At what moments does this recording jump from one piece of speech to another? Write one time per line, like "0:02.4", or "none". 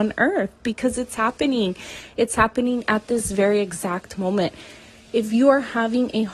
none

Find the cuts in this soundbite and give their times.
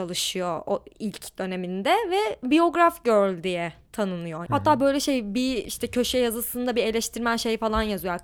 0:04.5

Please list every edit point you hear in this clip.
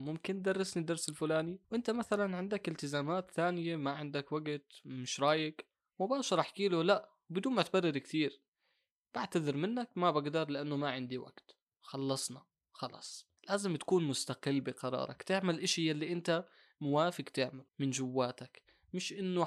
0:01.6
0:13.4
0:17.7

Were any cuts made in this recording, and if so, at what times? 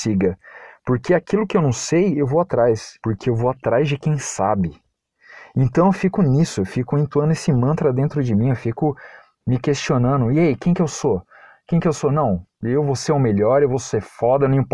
0:03.0

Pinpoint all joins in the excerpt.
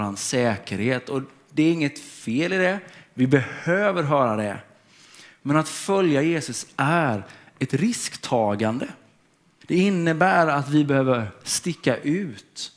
0:09.6

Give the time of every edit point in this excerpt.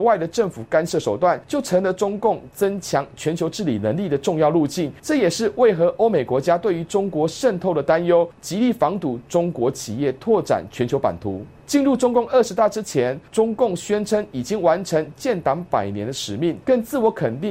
0:16.6

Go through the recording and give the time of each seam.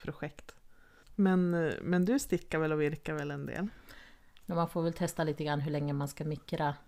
0:04.4

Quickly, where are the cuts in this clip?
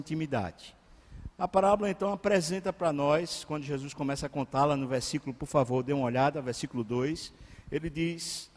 none

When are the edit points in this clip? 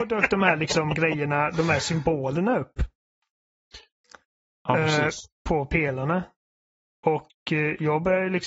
none

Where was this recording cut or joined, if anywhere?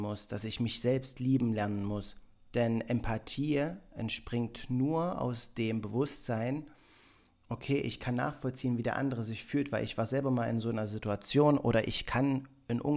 none

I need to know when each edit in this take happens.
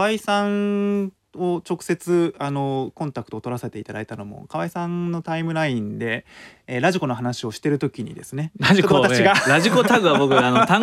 none

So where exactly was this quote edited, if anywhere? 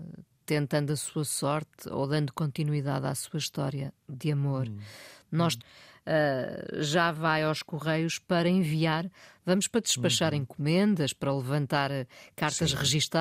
0:05.6

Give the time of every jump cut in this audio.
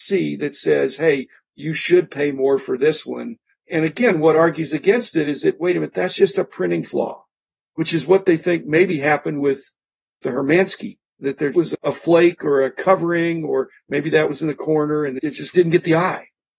0:11.5

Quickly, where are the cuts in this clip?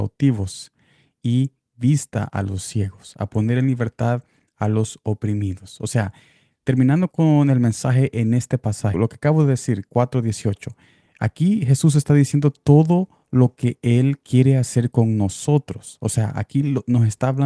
0:08.9

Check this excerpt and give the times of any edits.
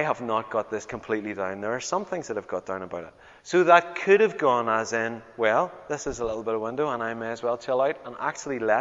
0:03.4

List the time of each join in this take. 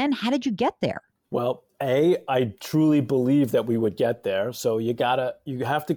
none

